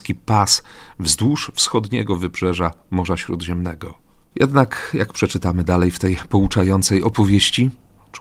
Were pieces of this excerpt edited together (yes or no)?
yes